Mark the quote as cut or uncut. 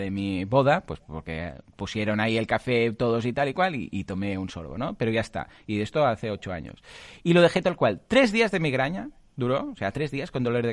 uncut